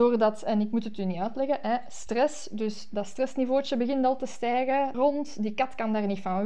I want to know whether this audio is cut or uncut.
cut